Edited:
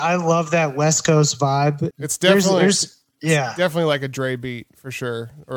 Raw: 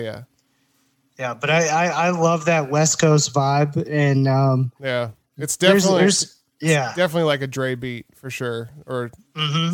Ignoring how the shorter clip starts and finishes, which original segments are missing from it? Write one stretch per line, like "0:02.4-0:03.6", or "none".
0:03.8-0:05.3

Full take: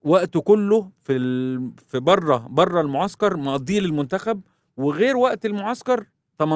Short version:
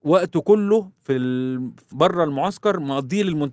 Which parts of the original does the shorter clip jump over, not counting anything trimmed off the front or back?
0:01.9-0:02.5

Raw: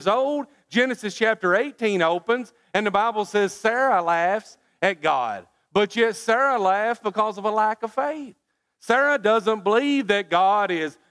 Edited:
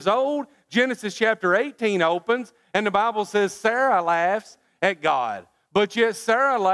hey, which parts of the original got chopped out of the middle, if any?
none

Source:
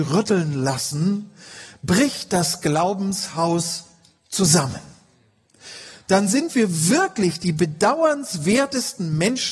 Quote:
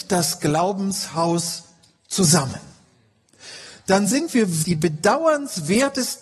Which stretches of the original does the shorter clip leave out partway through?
0:06.8-0:07.4

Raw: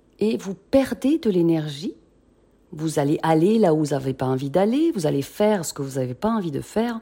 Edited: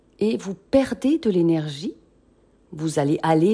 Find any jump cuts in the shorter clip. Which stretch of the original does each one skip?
none

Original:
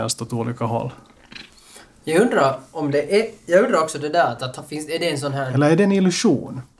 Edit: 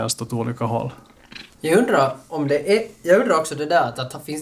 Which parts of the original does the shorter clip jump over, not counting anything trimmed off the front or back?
0:01.5-0:02.0

